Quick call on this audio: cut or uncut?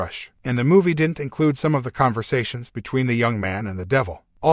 uncut